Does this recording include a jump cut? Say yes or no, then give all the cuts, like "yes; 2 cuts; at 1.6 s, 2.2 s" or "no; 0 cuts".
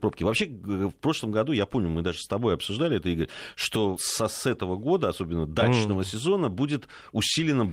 yes; 1 cut; at 4.0 s